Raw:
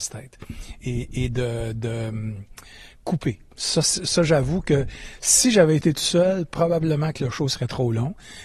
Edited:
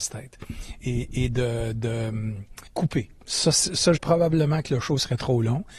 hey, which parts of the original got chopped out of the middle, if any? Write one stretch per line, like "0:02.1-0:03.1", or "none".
0:02.7-0:03.0
0:04.3-0:06.5